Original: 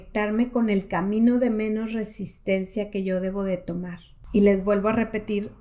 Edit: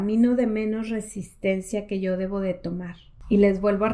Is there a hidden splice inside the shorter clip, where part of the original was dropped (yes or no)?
no